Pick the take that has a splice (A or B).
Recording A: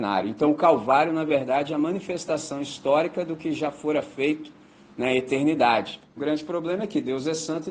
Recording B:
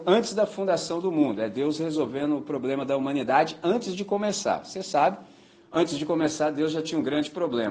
A